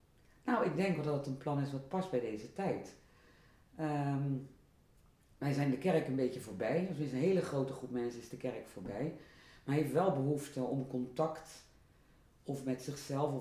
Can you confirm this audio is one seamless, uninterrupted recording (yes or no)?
yes